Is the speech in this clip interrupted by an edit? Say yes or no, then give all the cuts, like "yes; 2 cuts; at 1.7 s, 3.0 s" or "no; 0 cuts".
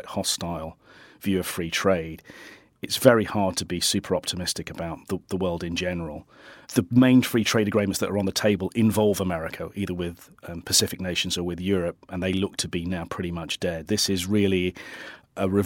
yes; 2 cuts; at 5.0 s, 13.9 s